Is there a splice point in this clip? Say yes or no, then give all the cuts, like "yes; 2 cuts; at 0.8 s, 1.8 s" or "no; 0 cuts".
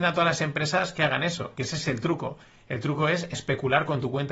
no; 0 cuts